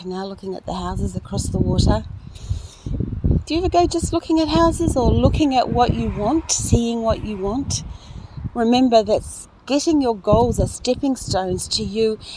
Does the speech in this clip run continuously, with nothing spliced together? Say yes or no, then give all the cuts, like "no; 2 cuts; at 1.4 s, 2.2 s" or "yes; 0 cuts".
yes; 0 cuts